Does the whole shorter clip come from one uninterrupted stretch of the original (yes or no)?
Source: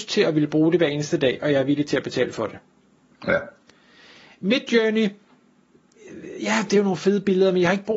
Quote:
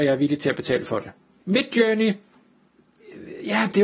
no